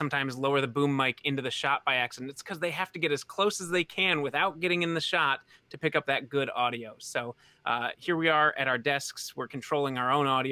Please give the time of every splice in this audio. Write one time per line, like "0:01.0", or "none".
none